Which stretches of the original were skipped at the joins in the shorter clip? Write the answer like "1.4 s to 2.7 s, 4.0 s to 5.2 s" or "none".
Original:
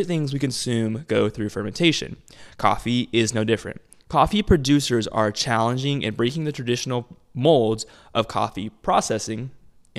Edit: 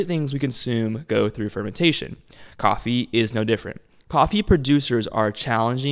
none